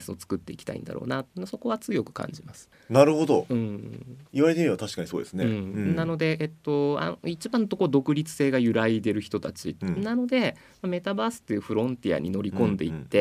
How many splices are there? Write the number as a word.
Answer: one